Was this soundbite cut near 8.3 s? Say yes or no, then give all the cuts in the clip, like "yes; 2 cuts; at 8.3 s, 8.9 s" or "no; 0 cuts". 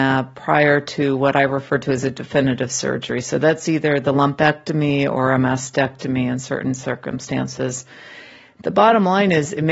no; 0 cuts